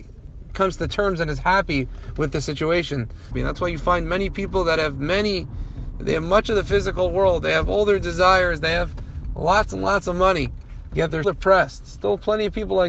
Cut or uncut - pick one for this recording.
cut